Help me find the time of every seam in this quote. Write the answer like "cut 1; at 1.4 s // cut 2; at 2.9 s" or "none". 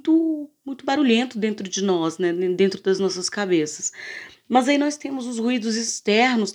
none